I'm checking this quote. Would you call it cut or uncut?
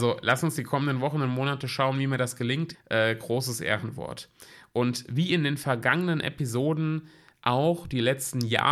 cut